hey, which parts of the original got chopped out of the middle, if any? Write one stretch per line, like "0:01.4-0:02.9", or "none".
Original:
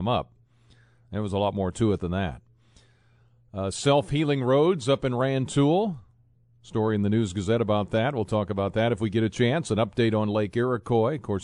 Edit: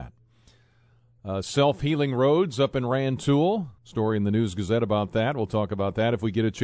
0:06.1-0:06.6